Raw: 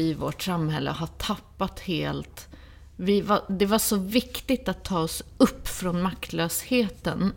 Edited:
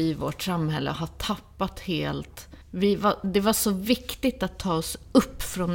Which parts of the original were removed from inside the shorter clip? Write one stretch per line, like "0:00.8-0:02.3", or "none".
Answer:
0:02.6-0:02.9